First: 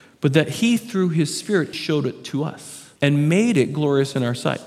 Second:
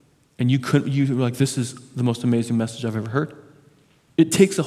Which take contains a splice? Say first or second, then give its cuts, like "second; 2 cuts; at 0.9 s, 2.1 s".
first; 2 cuts; at 1.7 s, 3.0 s